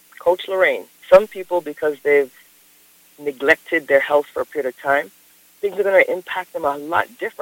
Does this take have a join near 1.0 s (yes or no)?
yes